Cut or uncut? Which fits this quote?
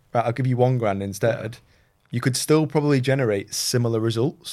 uncut